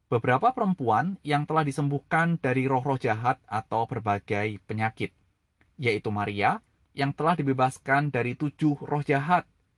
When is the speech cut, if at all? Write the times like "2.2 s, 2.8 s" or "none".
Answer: 6.8 s